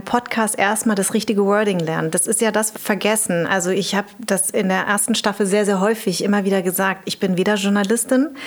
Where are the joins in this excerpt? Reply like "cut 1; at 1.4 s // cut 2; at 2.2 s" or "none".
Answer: cut 1; at 2.7 s

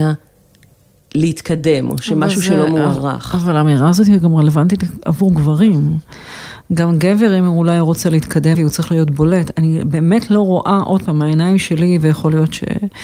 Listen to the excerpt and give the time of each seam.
cut 1; at 8.5 s

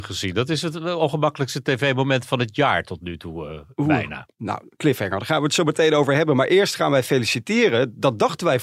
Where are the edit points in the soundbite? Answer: none

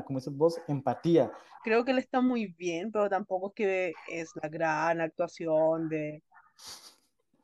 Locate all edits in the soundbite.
cut 1; at 1.6 s

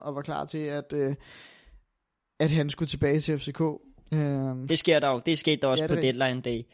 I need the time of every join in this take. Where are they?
cut 1; at 4.7 s

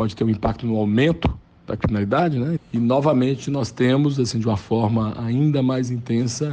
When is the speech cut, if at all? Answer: cut 1; at 2.6 s

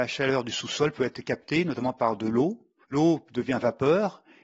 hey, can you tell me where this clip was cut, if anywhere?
cut 1; at 2.8 s

